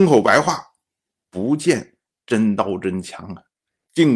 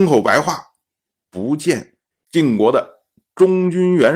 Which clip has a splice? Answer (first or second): second